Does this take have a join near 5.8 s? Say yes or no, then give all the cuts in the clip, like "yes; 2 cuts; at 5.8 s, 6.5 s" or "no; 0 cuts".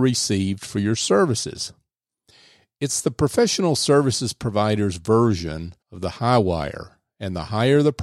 yes; 1 cut; at 5.8 s